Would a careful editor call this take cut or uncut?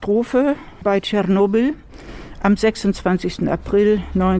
uncut